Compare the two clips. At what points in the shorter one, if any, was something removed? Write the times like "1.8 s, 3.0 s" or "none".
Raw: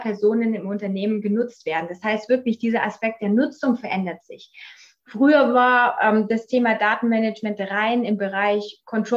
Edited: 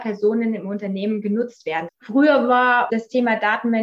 1.9 s, 2.9 s